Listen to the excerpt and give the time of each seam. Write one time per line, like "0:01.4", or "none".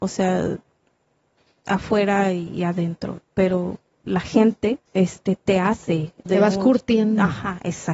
0:04.9
0:06.3